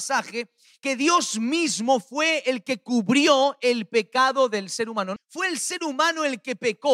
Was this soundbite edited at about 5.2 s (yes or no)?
yes